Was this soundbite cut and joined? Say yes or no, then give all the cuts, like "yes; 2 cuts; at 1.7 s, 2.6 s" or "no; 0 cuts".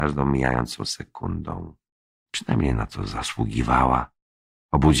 yes; 1 cut; at 2.1 s